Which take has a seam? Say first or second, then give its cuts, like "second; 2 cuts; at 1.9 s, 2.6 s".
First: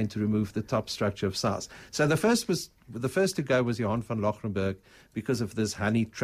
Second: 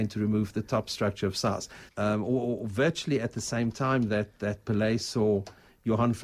second; 1 cut; at 1.9 s